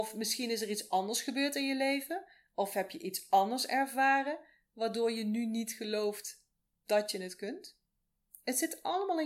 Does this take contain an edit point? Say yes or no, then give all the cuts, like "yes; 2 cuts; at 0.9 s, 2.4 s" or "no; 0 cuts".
no; 0 cuts